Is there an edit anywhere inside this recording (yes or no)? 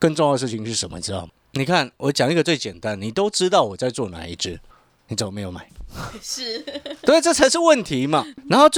no